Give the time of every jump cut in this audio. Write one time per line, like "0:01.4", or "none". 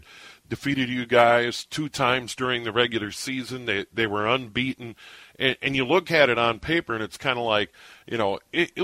none